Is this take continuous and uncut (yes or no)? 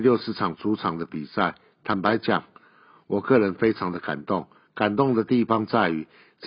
yes